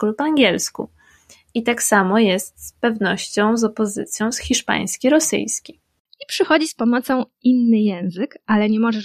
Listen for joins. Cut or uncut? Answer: uncut